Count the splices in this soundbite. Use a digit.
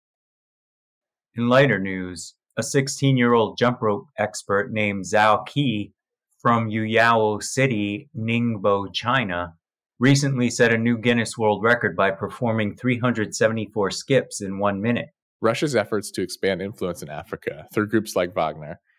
1